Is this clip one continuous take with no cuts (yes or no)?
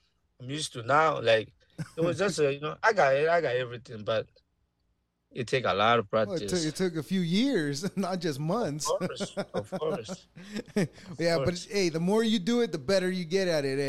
yes